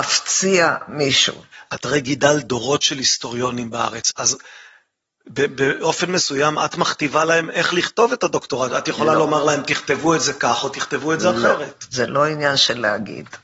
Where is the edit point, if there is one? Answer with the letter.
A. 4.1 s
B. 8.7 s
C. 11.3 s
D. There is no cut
A